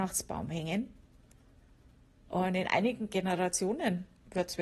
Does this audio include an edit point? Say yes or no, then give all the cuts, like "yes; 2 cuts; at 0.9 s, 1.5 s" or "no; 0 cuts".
no; 0 cuts